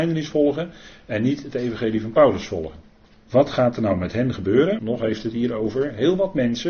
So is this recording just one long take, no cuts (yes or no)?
no